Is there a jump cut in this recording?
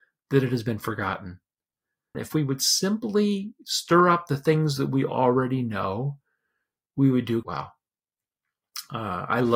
yes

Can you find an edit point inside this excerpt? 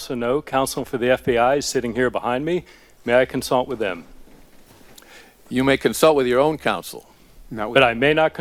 no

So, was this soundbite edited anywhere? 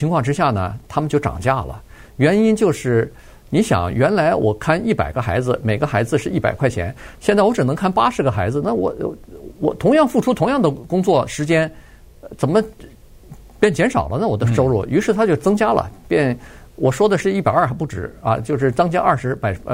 no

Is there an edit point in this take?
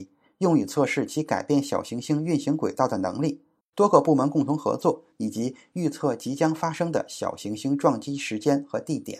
yes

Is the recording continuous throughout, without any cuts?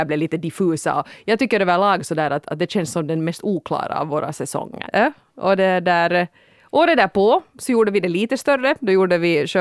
no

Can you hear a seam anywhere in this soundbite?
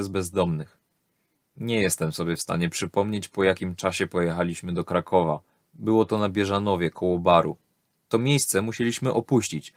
yes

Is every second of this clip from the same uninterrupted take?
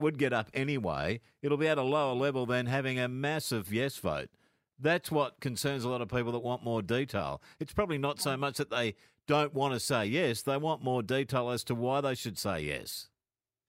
yes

